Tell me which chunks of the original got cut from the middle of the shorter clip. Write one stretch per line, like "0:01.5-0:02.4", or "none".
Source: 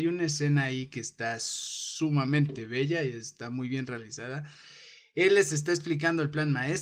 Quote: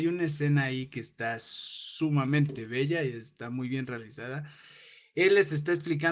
none